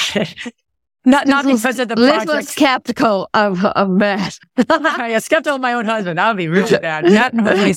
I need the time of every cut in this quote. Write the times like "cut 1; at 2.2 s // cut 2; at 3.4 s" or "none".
none